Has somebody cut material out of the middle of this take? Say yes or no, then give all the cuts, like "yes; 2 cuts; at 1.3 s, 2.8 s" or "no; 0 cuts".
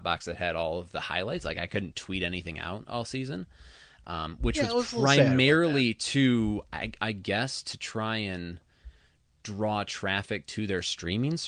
no; 0 cuts